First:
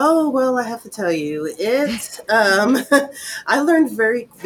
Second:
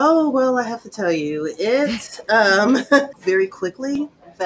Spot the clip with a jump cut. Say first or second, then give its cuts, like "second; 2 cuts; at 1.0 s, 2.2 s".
second; 1 cut; at 3.1 s